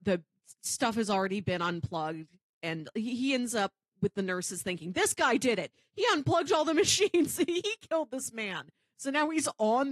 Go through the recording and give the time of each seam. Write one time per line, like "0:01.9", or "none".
none